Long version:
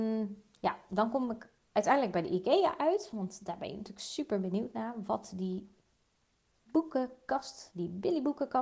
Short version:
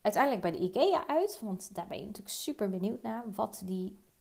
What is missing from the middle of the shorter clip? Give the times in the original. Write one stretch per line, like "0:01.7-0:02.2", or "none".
none